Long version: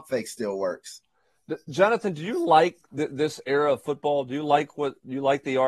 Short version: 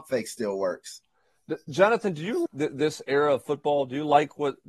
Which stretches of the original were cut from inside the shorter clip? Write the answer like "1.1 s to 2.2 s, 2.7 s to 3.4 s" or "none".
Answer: 2.5 s to 2.8 s